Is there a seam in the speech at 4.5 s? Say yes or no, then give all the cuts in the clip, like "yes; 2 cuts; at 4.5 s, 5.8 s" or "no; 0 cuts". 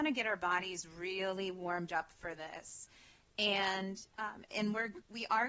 yes; 1 cut; at 4.5 s